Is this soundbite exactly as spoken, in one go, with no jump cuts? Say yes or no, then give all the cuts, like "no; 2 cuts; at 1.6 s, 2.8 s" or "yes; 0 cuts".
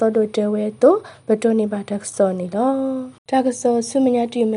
no; 1 cut; at 3.2 s